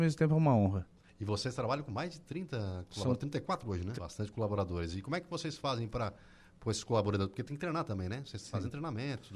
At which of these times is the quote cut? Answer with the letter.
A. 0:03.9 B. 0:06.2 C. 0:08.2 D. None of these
A